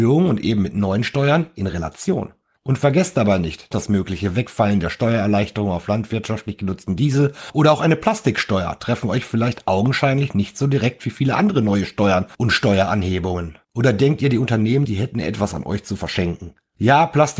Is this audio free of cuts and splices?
no; 3 cuts; at 3.7 s, 13.6 s, 14.8 s

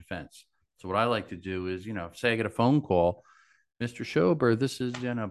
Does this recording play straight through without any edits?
yes; 0 cuts

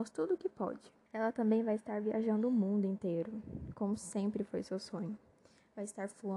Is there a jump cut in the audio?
yes; 1 cut; at 1.1 s

